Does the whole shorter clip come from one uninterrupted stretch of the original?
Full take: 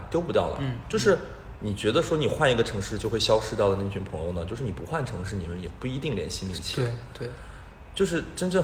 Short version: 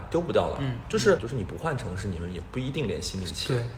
no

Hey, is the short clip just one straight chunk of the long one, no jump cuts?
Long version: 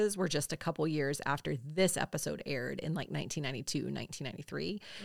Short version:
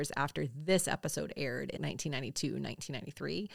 no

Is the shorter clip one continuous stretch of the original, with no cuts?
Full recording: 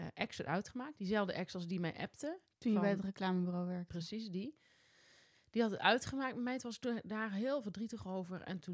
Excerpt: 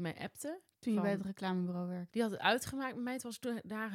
no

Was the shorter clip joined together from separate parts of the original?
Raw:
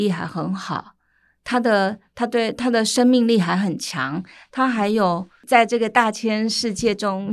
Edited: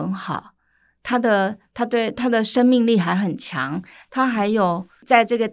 no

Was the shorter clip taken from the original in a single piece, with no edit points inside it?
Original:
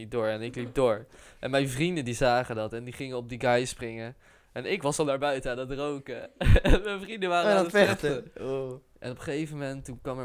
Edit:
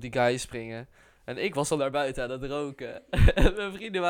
yes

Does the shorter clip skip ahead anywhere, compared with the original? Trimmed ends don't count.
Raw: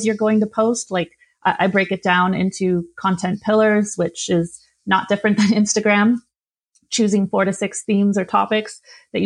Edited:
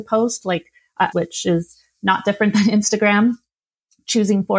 yes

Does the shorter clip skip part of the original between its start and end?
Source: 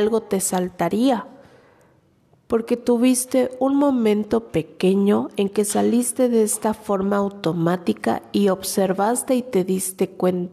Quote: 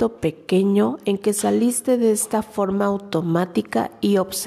no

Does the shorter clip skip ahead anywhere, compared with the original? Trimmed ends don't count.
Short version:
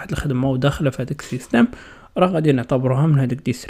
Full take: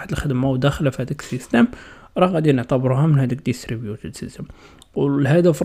no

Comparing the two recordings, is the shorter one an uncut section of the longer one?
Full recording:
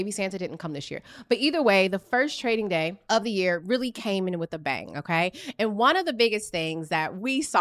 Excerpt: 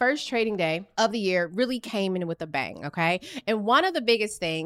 yes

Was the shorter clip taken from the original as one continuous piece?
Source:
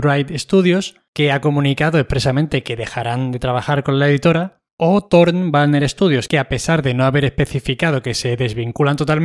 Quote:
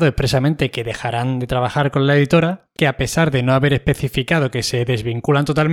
no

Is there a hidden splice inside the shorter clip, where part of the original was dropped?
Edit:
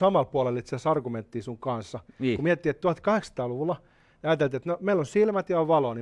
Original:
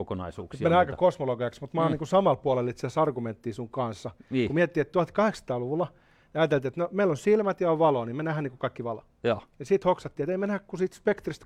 no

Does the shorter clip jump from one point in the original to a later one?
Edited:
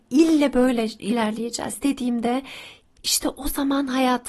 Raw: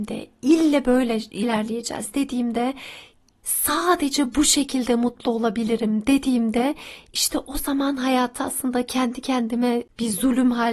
yes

